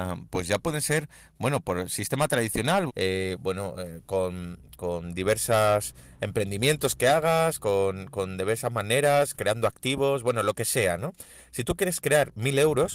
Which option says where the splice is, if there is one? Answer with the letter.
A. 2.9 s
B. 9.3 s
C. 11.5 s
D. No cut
A